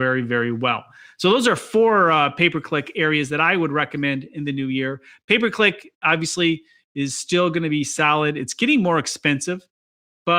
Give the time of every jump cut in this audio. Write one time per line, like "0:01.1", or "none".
none